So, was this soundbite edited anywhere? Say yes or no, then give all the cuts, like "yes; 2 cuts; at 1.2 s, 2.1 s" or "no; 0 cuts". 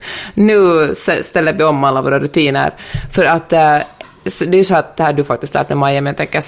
no; 0 cuts